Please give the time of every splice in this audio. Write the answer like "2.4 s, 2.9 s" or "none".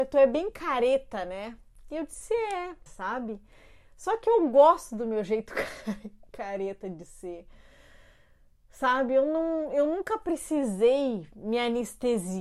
2.9 s

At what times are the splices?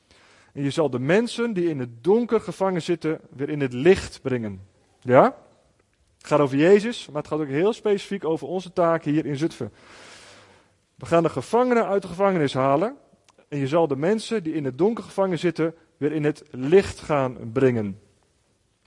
none

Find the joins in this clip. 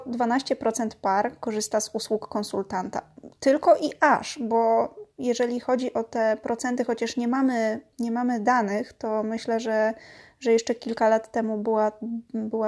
none

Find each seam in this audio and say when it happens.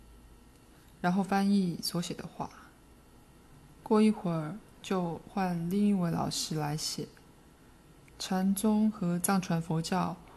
8.1 s

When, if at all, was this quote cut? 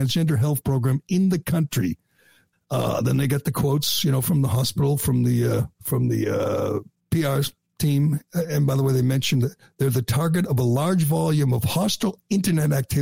2.5 s, 5.7 s

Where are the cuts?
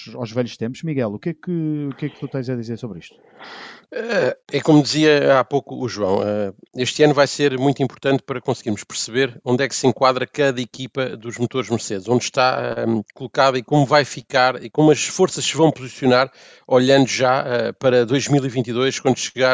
4.4 s

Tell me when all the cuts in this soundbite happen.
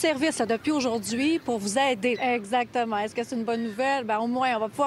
2.2 s

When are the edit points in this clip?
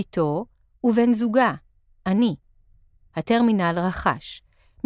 none

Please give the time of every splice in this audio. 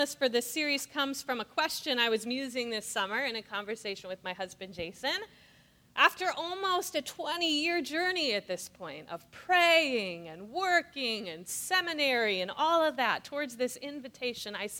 none

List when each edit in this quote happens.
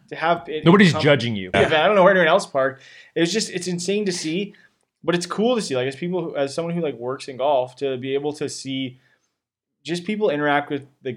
1.5 s

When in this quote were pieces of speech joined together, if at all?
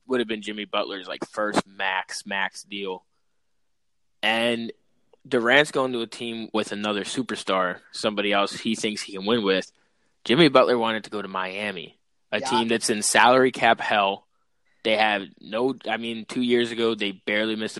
6.5 s

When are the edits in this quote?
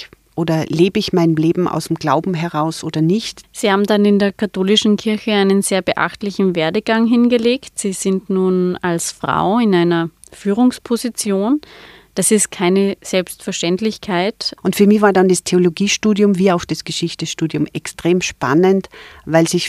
3.4 s, 14.6 s

